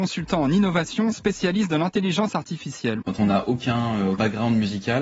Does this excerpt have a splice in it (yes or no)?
yes